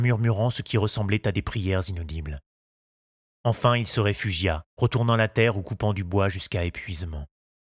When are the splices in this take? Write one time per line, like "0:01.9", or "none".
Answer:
0:04.7